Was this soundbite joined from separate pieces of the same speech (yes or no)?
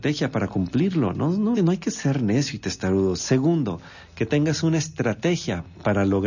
yes